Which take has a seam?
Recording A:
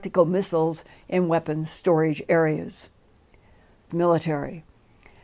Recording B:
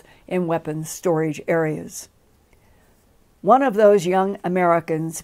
A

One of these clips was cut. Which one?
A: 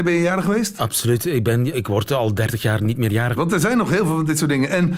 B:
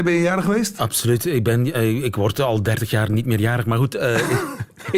A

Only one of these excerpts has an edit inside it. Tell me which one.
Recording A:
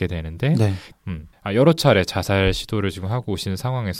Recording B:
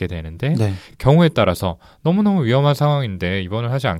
A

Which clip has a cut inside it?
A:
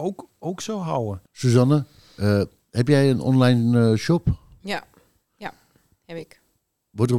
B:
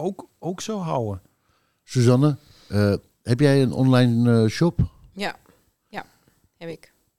A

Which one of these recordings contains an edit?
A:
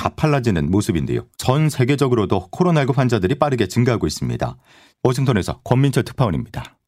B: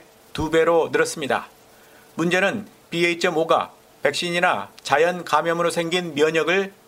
A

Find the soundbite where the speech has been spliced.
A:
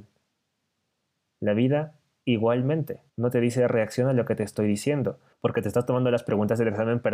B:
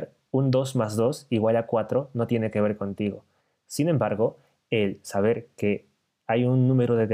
A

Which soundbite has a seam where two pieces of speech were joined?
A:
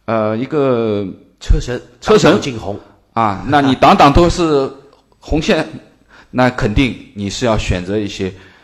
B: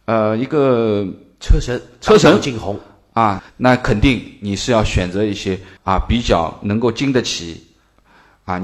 B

